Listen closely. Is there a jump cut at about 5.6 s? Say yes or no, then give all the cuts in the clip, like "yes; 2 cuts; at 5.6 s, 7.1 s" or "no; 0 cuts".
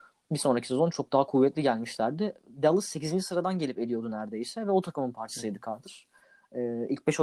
no; 1 cut; at 0.9 s